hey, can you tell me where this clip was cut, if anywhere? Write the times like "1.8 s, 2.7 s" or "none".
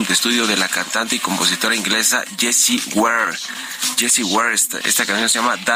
4.8 s